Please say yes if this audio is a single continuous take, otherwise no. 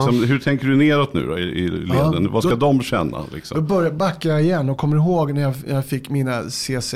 yes